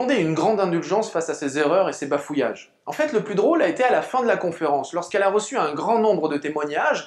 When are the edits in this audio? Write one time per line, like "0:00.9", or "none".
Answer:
none